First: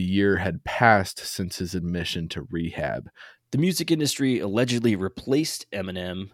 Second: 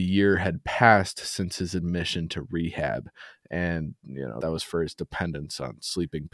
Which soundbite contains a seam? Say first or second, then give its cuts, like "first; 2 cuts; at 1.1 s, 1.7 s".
first; 1 cut; at 3.4 s